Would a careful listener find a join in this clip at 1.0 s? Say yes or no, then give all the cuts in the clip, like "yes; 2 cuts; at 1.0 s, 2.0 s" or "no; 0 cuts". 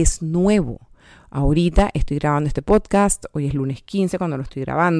no; 0 cuts